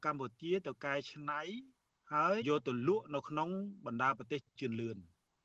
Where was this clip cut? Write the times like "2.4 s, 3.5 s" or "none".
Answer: 2.4 s